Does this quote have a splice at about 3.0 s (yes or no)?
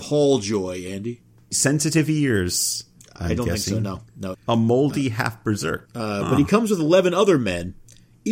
no